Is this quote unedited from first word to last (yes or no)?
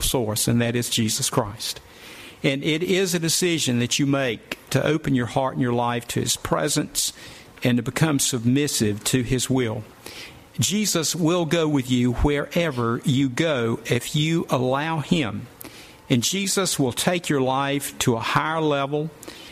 no